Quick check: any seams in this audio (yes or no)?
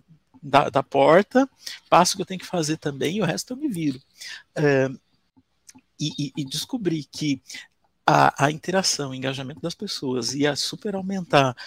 no